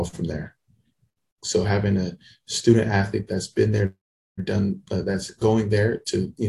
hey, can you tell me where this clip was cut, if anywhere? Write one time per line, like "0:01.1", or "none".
0:01.4